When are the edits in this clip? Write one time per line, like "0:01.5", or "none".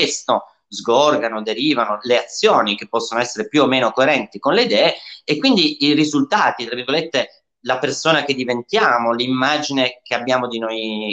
none